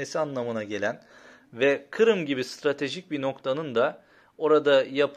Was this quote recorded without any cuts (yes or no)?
yes